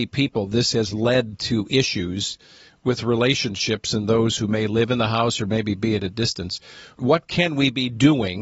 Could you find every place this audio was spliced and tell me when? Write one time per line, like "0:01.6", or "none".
none